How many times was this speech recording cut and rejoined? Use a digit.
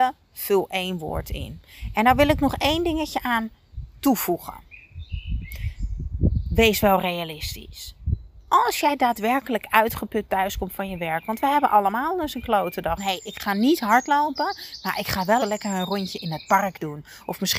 2